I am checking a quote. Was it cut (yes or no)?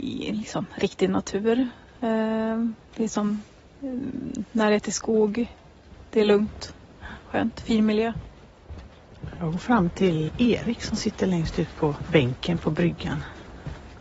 no